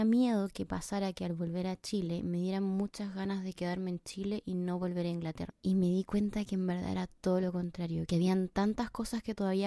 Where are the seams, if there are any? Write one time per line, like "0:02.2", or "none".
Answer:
0:05.5
0:08.1